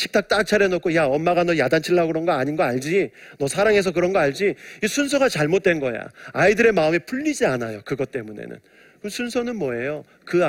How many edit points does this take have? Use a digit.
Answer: 0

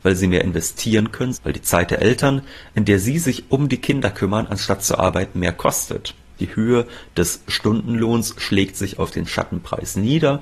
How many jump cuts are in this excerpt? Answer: 2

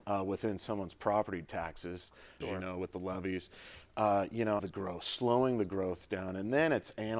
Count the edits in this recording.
2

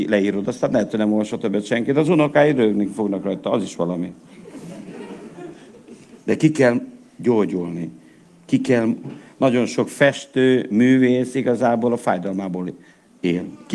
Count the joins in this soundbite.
0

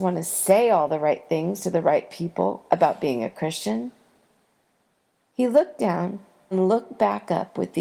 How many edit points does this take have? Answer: 1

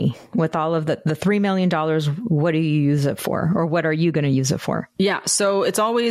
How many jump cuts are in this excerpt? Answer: 1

